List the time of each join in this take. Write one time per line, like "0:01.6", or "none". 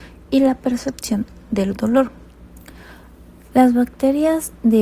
0:03.5